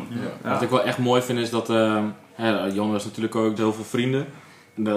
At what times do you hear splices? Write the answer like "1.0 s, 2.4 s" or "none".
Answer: 3.6 s